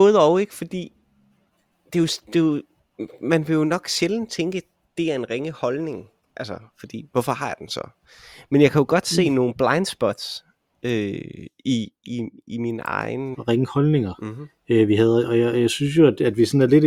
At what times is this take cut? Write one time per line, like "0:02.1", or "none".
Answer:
0:13.3